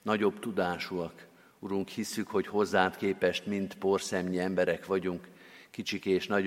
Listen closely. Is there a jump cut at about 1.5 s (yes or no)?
no